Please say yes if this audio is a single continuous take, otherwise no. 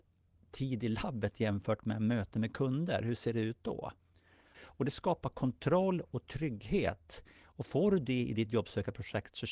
no